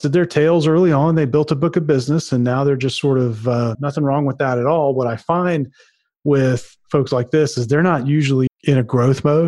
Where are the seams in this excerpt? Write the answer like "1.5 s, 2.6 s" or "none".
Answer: 3.7 s, 8.5 s